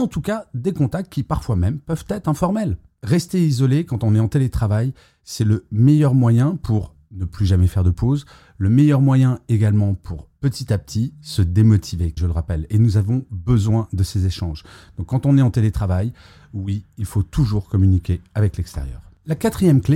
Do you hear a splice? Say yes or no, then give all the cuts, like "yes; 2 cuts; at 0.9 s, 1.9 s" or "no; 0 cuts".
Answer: yes; 1 cut; at 12.2 s